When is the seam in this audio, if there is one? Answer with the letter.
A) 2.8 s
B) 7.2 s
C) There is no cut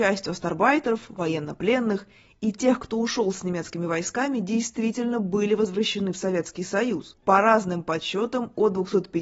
B